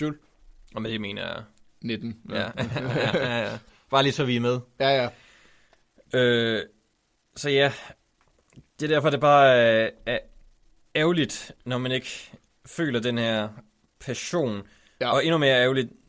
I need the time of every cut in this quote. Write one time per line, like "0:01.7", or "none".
none